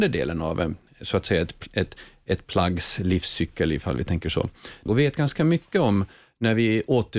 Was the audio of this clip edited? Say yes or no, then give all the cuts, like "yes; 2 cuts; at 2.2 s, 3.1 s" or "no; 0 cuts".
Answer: yes; 1 cut; at 4.9 s